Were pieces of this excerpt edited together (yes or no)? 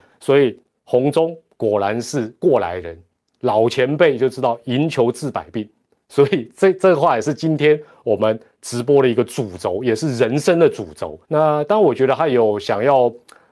yes